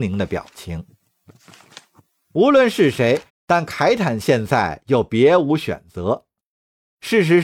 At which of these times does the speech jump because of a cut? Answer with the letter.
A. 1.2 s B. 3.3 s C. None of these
B